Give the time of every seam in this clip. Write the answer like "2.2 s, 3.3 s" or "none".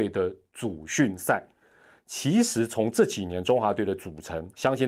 none